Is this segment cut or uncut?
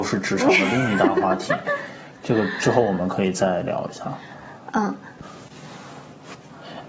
uncut